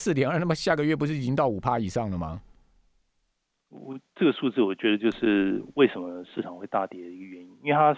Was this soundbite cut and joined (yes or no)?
no